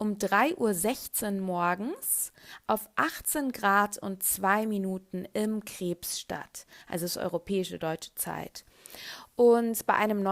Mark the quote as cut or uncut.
uncut